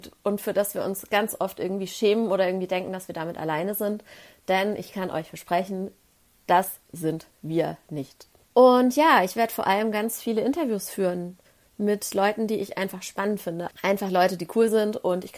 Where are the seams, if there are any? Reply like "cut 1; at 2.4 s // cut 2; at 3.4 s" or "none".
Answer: cut 1; at 8.4 s // cut 2; at 13.7 s

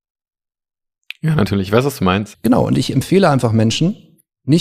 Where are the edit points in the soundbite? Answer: cut 1; at 2.3 s

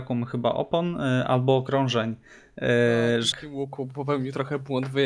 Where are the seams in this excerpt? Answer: cut 1; at 3.3 s

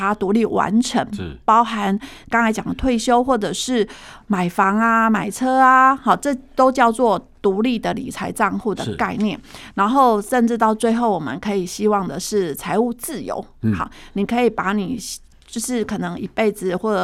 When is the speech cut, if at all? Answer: none

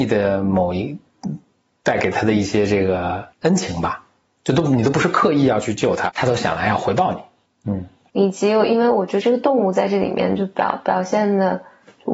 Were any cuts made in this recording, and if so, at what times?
cut 1; at 3.3 s // cut 2; at 6.1 s // cut 3; at 7.6 s

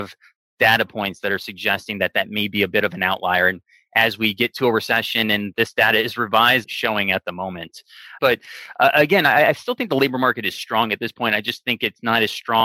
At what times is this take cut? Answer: cut 1; at 6.6 s // cut 2; at 8.2 s

